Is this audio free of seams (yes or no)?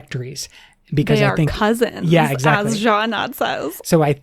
yes